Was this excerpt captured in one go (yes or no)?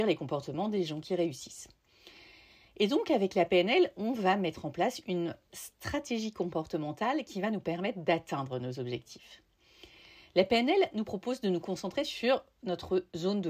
yes